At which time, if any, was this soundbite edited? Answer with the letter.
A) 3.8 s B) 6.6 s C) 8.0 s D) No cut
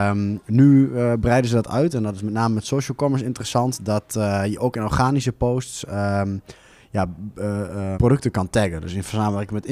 C